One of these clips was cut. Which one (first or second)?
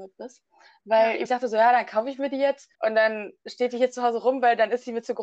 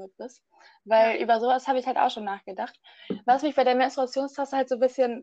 first